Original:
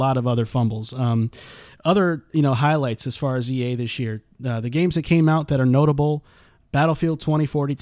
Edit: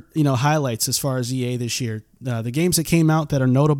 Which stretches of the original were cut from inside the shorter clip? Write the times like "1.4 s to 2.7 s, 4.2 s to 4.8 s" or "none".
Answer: none